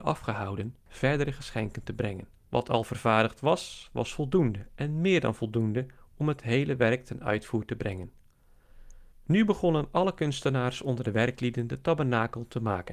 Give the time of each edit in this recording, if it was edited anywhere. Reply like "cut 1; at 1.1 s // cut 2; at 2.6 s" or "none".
cut 1; at 2.4 s // cut 2; at 9.1 s

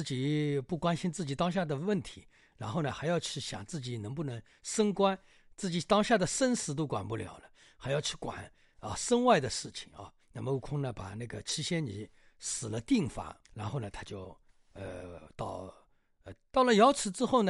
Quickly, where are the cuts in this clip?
cut 1; at 10.2 s // cut 2; at 13.4 s // cut 3; at 16.5 s

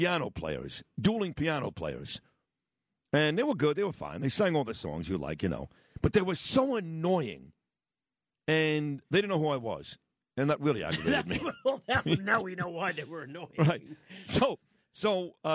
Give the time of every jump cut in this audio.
none

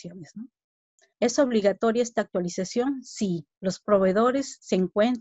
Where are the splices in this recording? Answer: cut 1; at 1.1 s // cut 2; at 3.5 s

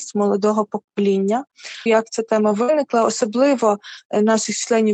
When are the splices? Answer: cut 1; at 1.9 s

